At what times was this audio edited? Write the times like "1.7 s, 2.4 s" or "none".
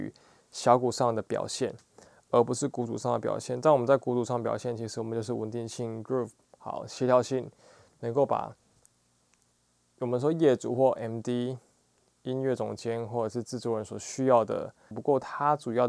14.9 s